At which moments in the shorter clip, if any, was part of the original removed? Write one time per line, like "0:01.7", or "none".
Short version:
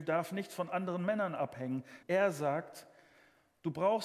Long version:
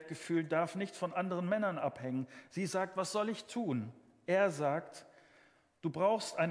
0:02.0